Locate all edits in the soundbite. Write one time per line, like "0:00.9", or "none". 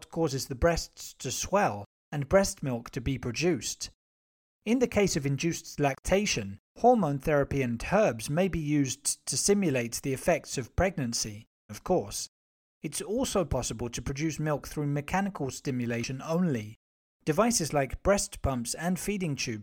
0:11.7